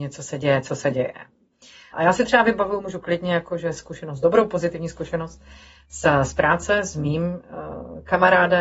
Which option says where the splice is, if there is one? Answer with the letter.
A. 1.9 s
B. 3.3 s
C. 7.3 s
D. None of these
A